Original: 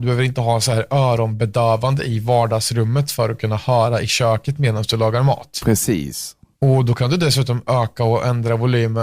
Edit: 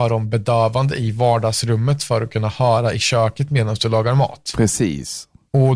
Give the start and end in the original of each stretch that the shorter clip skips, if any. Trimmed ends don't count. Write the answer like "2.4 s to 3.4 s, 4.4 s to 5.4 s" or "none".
none